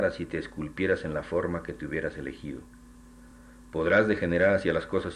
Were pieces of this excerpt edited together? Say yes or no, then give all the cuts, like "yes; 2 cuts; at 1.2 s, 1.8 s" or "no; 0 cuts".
no; 0 cuts